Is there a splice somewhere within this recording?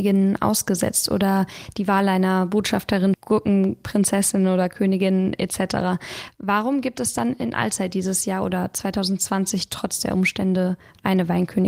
yes; 1 cut; at 3.1 s

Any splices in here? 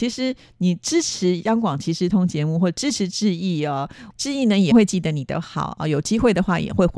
yes; 1 cut; at 4.7 s

